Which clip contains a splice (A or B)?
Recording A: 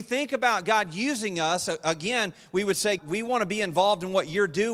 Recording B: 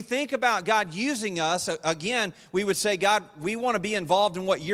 A